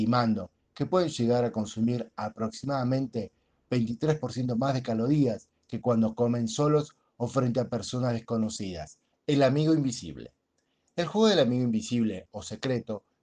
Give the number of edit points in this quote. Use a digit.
1